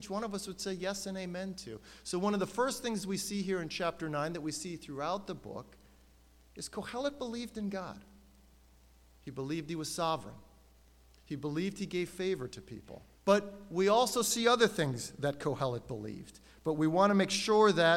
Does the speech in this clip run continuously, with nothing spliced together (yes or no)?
no